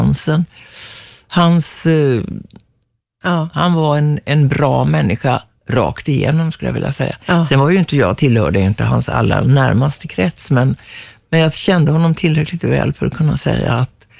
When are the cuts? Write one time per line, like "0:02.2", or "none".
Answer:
0:03.2